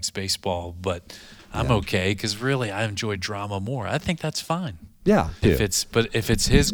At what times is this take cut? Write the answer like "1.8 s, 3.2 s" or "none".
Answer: 5.4 s